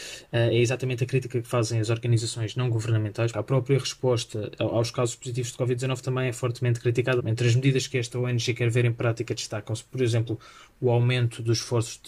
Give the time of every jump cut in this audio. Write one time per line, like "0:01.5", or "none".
0:03.3
0:07.2